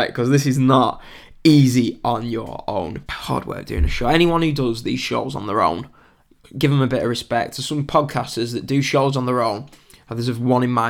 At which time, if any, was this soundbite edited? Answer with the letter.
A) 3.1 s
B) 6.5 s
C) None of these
A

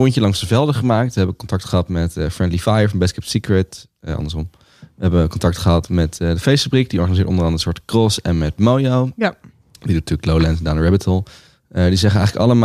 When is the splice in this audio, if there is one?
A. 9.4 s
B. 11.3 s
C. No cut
C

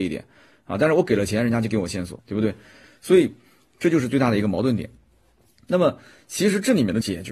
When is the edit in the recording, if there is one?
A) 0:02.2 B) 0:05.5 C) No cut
A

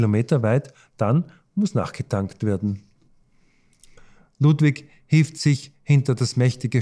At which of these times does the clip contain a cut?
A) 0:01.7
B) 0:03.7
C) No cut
C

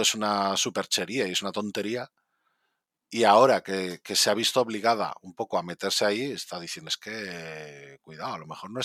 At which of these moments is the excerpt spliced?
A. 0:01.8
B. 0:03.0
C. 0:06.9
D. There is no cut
C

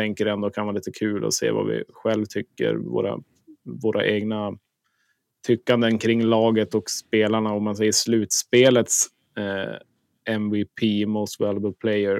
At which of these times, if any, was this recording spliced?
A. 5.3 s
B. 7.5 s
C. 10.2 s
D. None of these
D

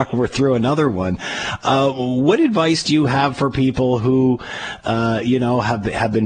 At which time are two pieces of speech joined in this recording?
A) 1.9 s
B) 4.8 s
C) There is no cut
C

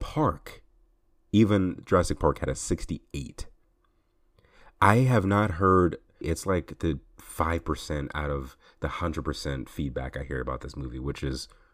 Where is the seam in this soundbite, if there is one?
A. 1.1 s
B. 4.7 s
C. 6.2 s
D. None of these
C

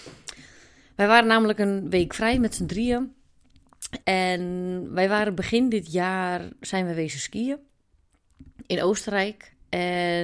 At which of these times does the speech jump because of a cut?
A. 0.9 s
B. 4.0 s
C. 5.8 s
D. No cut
B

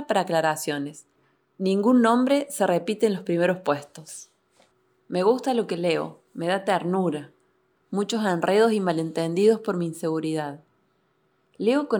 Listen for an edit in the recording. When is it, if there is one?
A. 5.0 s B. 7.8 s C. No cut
B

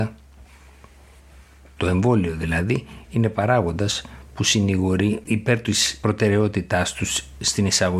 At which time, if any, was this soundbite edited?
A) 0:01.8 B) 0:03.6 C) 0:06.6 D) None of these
A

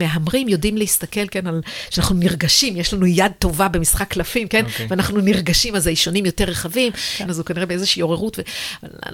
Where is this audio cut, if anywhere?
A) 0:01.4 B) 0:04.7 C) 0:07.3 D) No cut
C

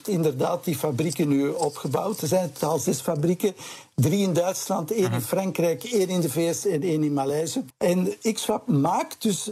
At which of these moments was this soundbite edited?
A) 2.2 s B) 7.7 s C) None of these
B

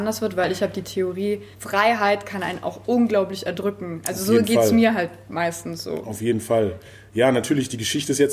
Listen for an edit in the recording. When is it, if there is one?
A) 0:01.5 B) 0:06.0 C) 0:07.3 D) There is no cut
A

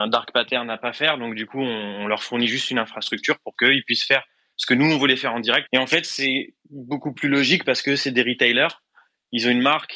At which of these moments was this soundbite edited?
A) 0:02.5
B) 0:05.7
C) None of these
B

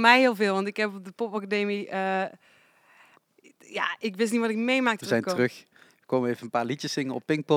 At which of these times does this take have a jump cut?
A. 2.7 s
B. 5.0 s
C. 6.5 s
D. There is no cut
B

